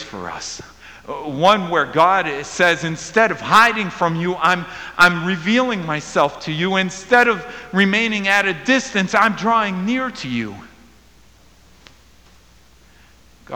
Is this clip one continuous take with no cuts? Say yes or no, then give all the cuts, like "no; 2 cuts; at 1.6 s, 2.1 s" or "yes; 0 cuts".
yes; 0 cuts